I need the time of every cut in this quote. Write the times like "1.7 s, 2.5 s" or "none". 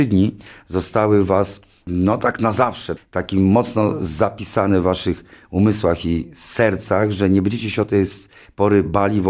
3.0 s